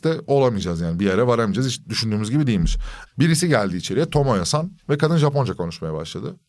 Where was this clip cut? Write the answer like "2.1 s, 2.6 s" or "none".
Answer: 3.1 s